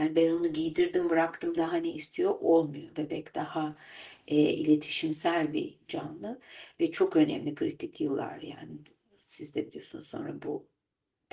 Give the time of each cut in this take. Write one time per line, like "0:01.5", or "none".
none